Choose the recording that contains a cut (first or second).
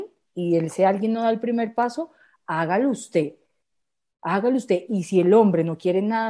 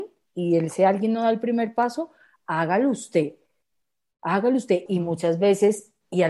second